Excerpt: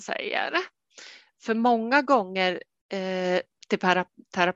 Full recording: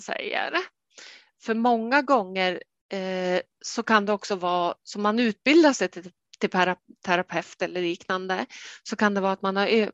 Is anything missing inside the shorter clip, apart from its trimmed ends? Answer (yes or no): yes